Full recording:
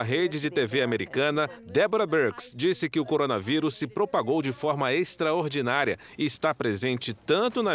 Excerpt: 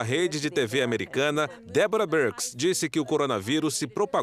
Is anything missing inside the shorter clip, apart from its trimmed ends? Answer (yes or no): no